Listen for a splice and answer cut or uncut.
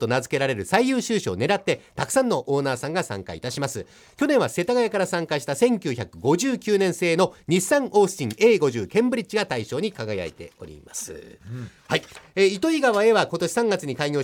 uncut